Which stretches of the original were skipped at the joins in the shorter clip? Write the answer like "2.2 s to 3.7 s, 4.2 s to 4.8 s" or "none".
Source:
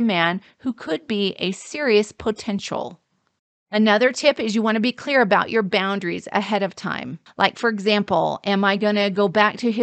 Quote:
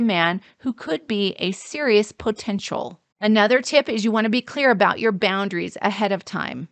3.1 s to 3.6 s